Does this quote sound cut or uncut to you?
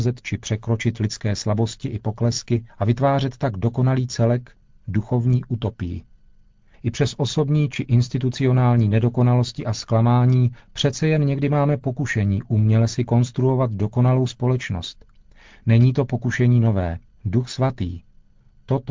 cut